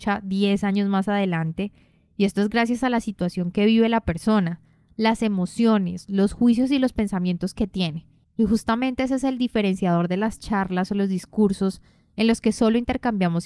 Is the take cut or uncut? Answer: uncut